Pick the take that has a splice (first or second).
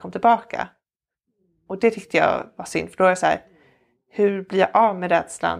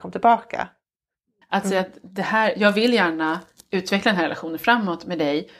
second